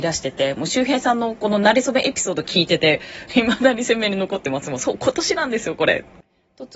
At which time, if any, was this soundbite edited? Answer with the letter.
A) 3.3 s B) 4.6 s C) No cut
A